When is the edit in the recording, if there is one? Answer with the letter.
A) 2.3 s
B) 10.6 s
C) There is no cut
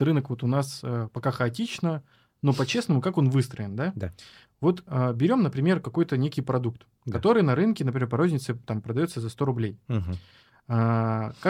C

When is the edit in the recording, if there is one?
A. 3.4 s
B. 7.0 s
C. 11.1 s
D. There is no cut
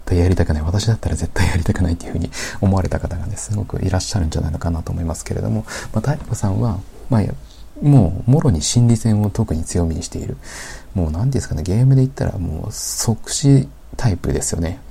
D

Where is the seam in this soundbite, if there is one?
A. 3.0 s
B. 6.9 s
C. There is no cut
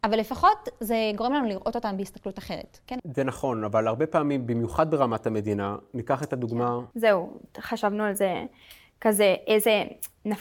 A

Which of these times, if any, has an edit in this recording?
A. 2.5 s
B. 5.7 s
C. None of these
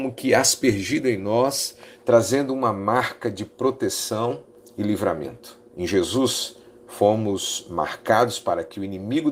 B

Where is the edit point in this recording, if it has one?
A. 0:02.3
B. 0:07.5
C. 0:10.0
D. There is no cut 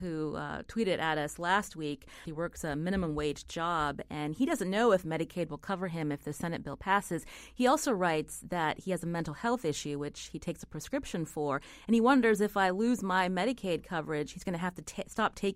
A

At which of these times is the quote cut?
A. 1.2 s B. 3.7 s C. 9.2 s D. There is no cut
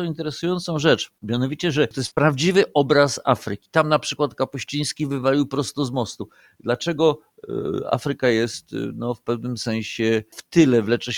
D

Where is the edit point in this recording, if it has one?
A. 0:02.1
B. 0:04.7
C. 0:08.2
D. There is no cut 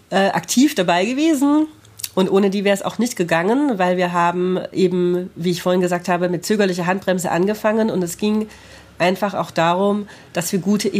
D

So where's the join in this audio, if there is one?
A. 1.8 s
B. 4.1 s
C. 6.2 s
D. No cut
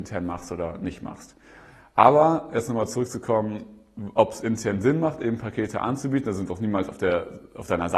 D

